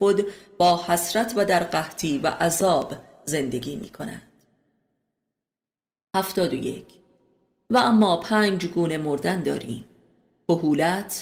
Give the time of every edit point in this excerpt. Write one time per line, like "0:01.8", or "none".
none